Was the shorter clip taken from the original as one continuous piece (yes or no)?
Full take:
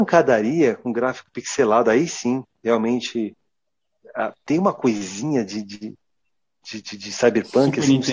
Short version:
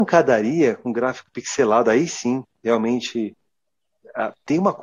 yes